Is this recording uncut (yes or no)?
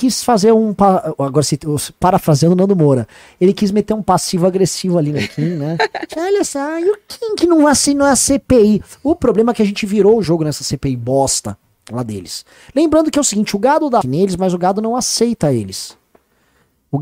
no